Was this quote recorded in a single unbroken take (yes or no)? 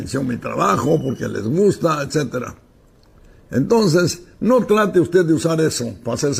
yes